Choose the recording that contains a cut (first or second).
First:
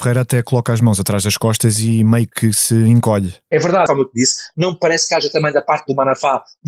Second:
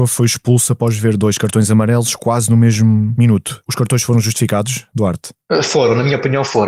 first